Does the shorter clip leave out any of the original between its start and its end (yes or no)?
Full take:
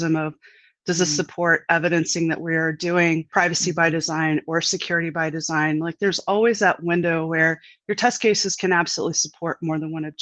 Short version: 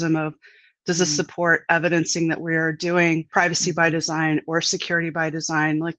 no